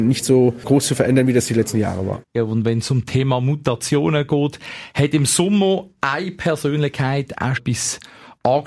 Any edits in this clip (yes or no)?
yes